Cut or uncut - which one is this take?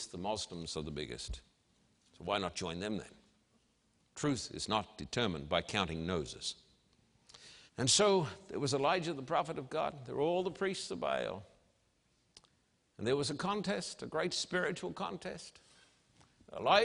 cut